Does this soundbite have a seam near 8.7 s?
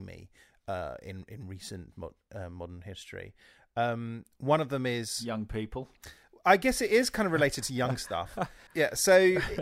yes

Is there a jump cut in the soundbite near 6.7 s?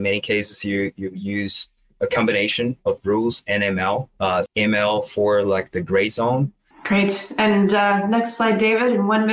yes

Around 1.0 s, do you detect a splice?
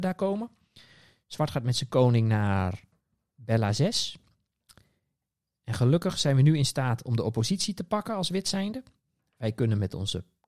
no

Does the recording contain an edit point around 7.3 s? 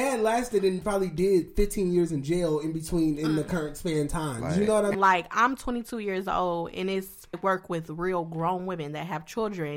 yes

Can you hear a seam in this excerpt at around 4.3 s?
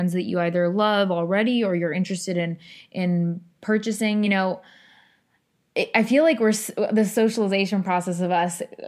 no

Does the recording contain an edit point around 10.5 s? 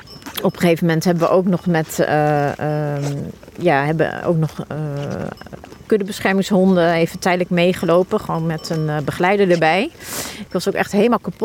yes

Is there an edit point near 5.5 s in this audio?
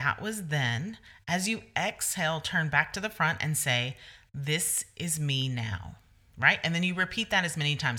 no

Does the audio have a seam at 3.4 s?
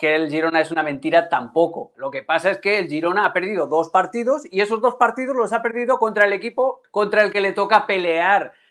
no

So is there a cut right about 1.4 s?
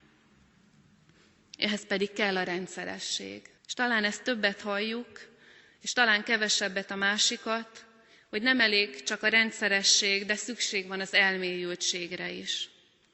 no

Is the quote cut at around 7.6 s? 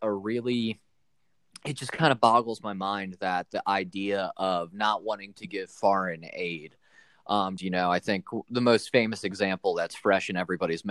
yes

